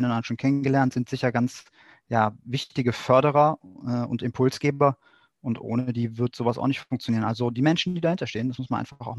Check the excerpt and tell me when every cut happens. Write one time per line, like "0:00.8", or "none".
none